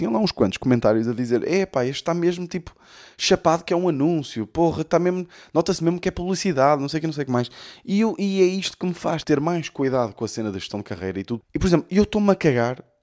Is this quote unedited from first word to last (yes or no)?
no